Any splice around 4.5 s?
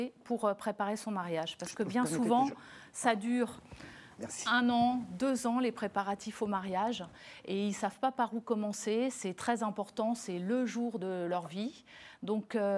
no; 0 cuts

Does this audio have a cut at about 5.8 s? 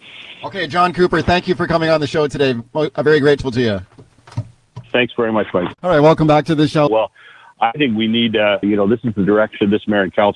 yes; 3 cuts; at 5.8 s, 6.9 s, 8.6 s

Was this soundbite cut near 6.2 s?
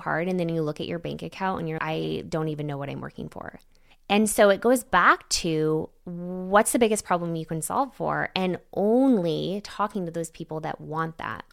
no; 2 cuts; at 1.8 s, 3.9 s

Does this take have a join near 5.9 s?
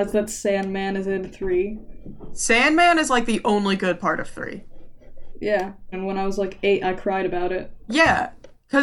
yes; 1 cut; at 5.9 s

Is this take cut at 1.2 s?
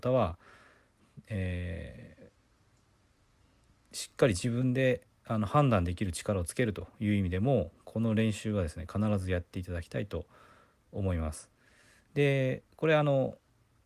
no; 0 cuts

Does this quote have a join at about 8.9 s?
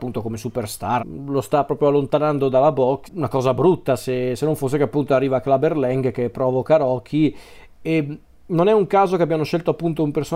no; 2 cuts; at 1.0 s, 3.1 s

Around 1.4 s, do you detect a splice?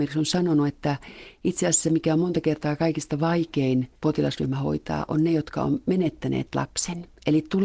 no; 1 cut; at 4.0 s

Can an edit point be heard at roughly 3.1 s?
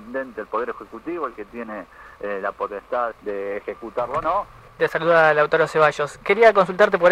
yes; 2 cuts; at 3.1 s, 4.8 s

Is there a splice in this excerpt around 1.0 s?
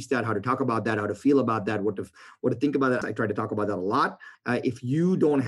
no; 2 cuts; at 3.0 s, 4.3 s

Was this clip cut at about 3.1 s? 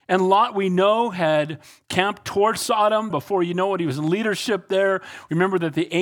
yes; 1 cut; at 3.1 s

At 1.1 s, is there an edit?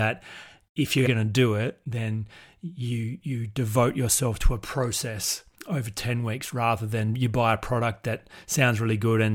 yes; 2 cuts; at 1.1 s, 5.5 s

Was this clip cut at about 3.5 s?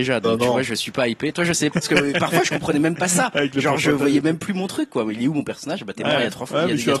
no; 1 cut; at 1.7 s

